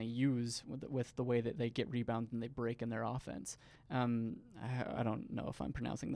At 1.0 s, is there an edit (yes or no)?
no